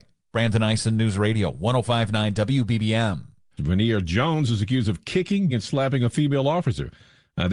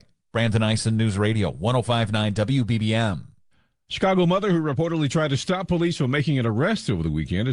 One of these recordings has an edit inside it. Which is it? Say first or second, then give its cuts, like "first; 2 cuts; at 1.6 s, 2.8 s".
first; 2 cuts; at 3.6 s, 5.5 s